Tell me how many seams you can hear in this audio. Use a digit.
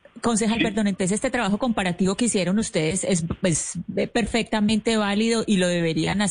0